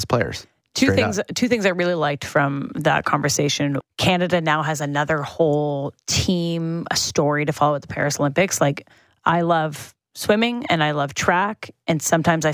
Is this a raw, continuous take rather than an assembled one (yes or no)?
no